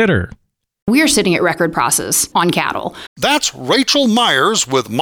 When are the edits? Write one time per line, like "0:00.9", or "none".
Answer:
0:03.1

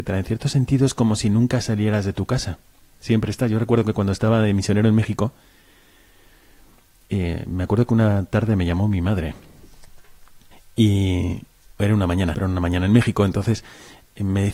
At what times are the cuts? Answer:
0:12.3

